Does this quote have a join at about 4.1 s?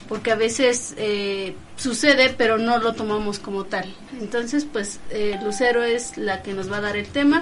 yes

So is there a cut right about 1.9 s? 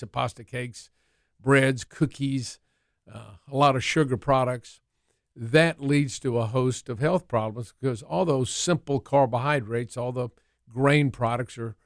no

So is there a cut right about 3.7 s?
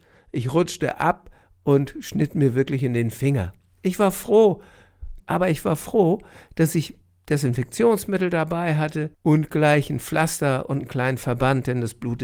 no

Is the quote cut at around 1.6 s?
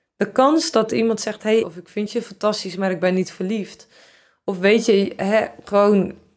yes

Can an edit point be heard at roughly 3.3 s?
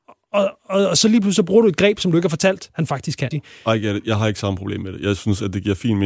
yes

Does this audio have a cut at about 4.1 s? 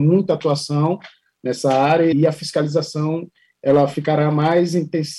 no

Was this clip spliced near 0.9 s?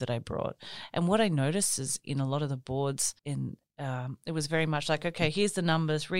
no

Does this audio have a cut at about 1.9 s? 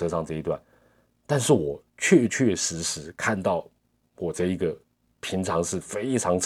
yes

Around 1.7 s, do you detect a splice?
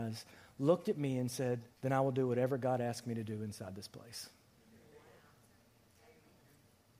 yes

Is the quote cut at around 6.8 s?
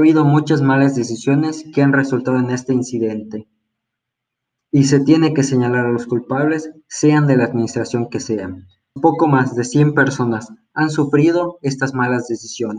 no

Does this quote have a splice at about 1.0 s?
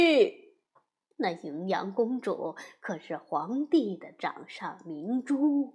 yes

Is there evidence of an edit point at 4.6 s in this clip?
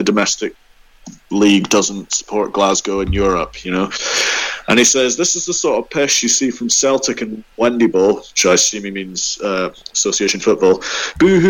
no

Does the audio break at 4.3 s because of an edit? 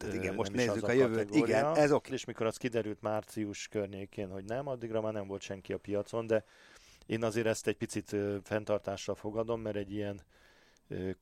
no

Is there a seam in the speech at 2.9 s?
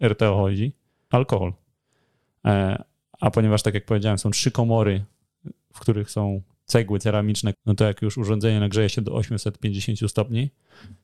no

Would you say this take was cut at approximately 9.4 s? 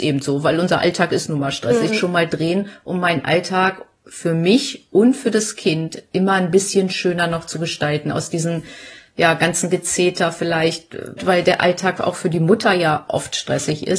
no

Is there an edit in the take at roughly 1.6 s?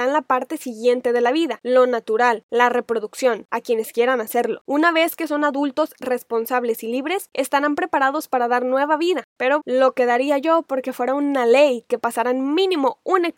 no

